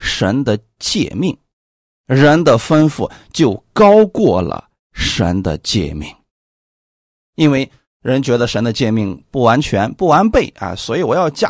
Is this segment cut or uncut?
cut